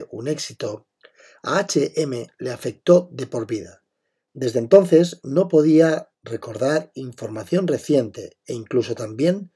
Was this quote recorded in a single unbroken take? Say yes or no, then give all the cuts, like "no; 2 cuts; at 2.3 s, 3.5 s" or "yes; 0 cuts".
yes; 0 cuts